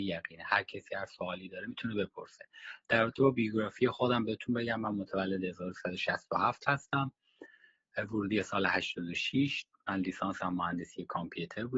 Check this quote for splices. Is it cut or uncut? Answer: uncut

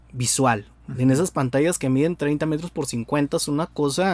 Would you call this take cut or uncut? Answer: uncut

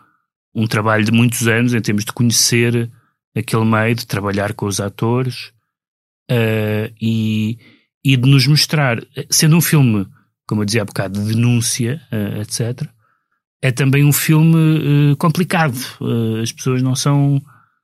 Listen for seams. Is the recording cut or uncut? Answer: uncut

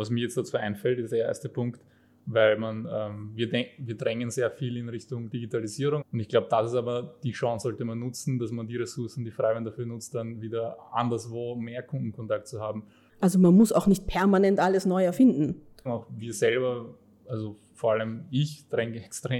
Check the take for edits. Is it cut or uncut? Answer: cut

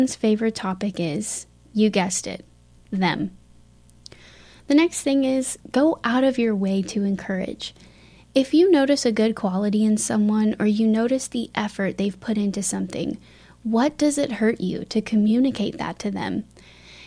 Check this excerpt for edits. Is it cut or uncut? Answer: uncut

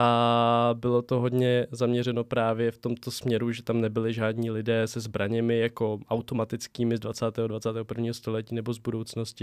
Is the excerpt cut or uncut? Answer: uncut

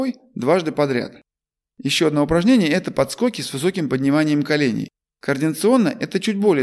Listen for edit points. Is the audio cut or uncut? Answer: uncut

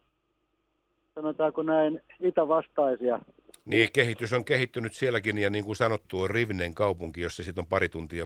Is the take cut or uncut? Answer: cut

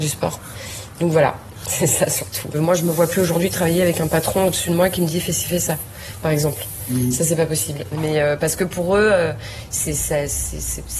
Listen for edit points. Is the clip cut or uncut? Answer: cut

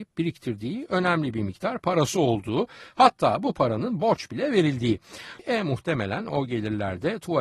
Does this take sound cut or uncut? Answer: cut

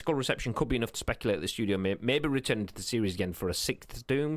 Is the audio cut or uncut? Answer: uncut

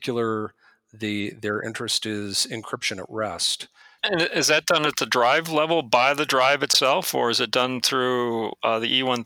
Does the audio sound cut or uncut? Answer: cut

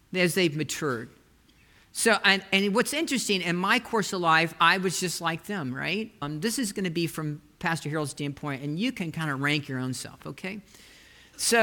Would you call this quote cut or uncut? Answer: cut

